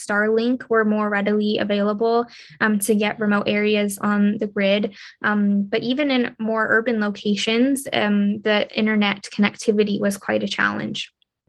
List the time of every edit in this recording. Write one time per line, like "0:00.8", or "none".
none

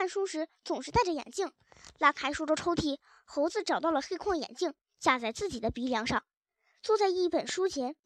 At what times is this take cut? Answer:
none

